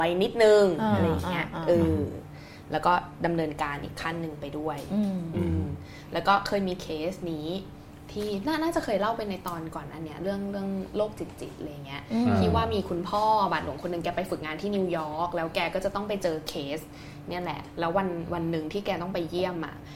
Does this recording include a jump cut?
no; 0 cuts

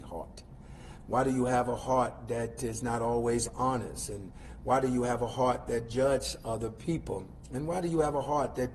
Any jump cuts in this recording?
no; 0 cuts

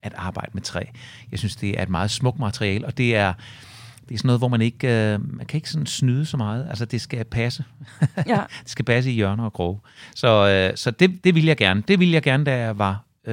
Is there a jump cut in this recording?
no; 0 cuts

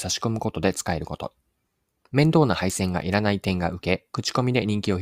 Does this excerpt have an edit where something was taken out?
no; 0 cuts

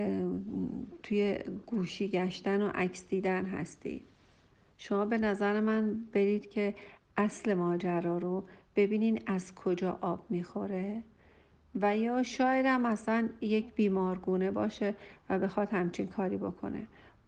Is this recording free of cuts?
yes; 0 cuts

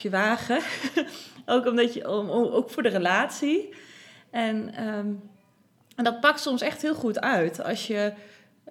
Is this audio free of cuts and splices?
yes; 0 cuts

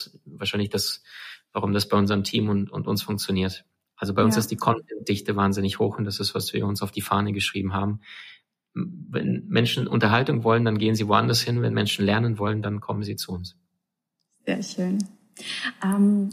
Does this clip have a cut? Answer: no; 0 cuts

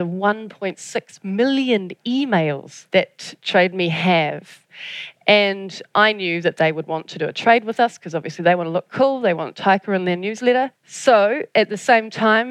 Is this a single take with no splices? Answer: yes; 0 cuts

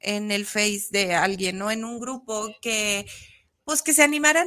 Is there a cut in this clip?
no; 0 cuts

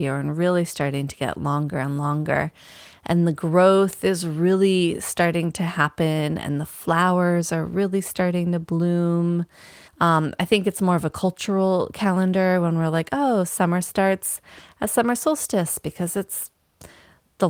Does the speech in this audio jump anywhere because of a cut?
yes; 1 cut; at 9.9 s

